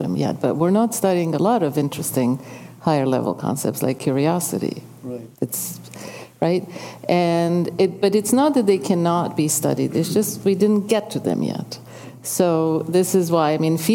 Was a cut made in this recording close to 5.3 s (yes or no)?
yes